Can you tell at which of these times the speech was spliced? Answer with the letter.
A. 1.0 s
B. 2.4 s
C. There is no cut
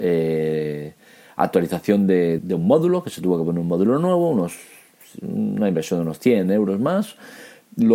B